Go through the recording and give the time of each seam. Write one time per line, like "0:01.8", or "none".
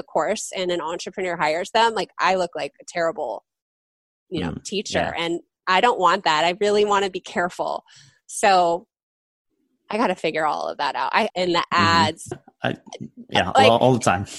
0:11.3
0:12.3